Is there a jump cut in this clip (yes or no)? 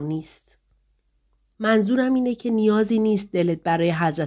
yes